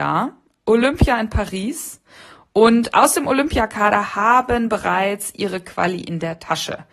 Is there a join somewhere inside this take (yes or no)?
no